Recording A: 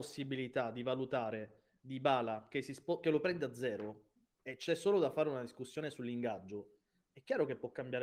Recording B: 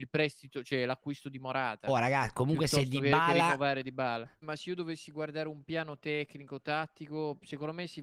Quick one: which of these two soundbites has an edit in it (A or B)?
B